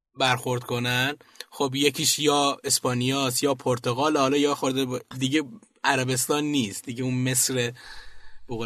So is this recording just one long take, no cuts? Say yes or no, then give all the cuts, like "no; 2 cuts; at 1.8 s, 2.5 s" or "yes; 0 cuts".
no; 1 cut; at 5.1 s